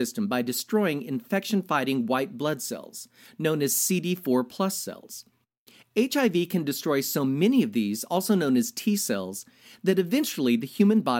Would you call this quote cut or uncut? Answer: uncut